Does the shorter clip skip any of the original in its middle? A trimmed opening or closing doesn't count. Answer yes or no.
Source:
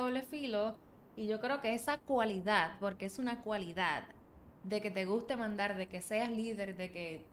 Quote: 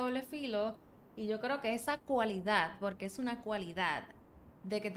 no